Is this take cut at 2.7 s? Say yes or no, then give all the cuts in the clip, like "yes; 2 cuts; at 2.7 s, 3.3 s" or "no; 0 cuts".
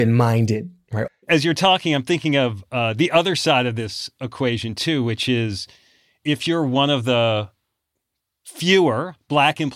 no; 1 cut; at 1.1 s